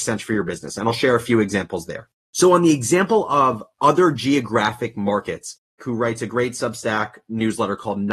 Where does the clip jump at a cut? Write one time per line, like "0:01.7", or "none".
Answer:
0:05.8